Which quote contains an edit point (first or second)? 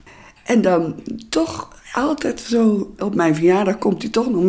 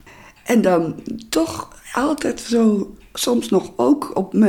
first